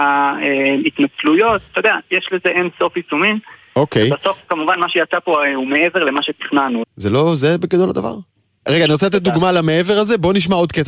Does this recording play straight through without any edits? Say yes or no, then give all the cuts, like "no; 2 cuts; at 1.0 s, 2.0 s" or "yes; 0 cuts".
no; 2 cuts; at 6.8 s, 8.7 s